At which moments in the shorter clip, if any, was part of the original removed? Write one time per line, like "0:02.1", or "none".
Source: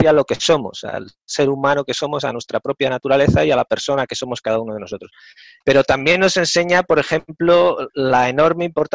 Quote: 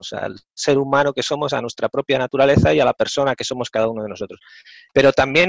none